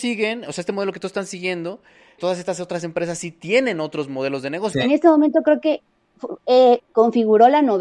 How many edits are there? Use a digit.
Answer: 3